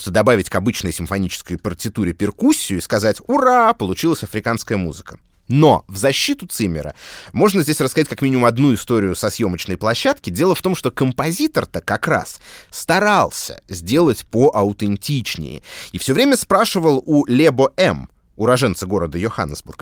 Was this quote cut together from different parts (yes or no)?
no